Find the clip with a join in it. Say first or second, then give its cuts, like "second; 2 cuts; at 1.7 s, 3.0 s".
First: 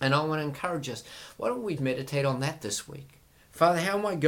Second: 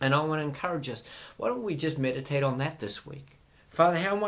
first; 1 cut; at 1.8 s